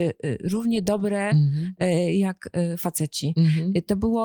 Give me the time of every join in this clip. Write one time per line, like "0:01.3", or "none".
none

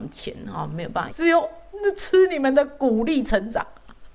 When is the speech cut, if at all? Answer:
0:01.1

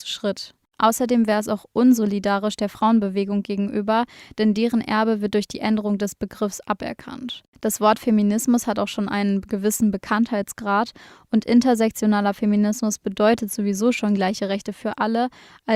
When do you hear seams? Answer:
none

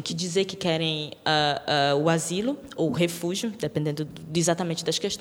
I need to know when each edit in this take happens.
0:04.1

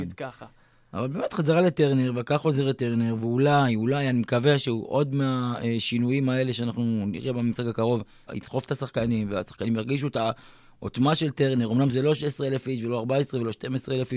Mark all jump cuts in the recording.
0:08.3

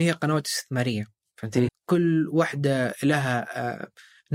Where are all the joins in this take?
0:01.7

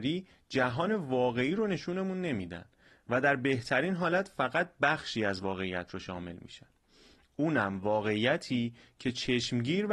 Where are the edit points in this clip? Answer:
none

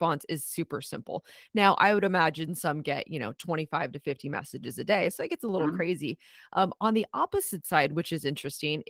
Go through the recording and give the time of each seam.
none

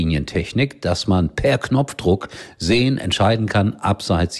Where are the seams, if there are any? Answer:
none

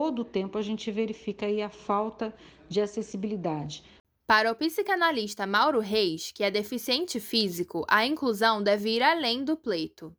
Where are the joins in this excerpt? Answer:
none

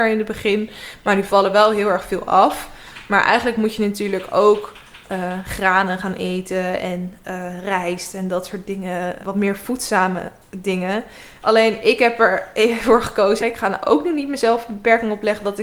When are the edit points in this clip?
0:09.2
0:11.4
0:13.4

